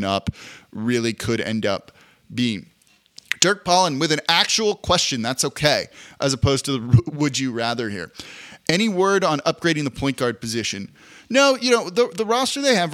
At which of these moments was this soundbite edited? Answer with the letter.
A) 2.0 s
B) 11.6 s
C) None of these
C